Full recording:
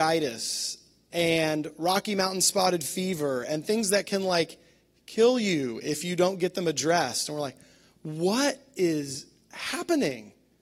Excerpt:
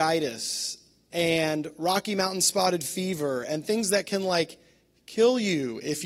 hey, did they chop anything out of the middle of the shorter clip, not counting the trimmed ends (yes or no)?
no